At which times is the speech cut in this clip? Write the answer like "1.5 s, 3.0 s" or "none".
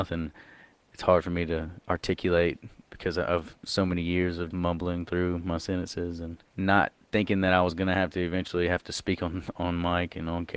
4.5 s, 6.5 s